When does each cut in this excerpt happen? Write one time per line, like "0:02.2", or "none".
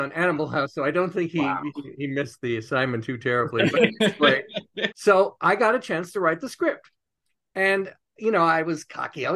0:04.9